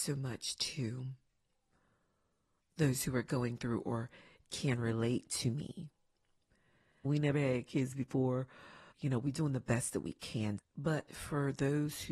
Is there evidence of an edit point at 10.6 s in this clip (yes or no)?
yes